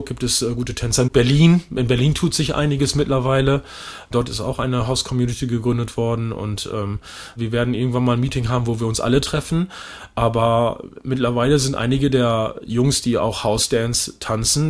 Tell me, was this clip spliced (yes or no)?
yes